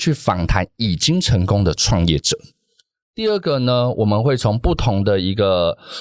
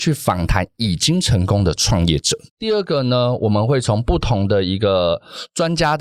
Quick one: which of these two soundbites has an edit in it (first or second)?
second